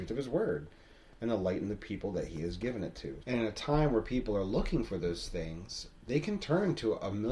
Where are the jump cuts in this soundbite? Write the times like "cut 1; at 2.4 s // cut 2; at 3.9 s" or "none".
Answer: cut 1; at 3.2 s